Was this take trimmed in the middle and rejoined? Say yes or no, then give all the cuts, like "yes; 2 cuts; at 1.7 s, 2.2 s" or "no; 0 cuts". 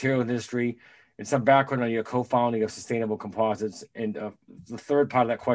no; 0 cuts